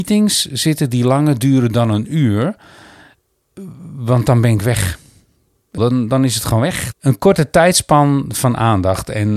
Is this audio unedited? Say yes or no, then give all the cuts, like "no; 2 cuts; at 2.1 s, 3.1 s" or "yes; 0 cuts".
no; 2 cuts; at 5.8 s, 6.9 s